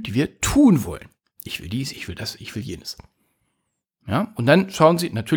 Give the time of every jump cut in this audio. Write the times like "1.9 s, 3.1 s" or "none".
none